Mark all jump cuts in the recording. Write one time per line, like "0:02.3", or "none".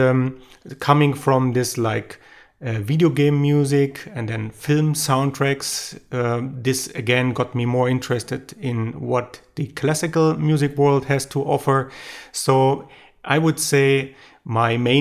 none